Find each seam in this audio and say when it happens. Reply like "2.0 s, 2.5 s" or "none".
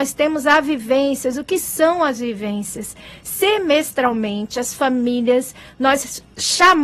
none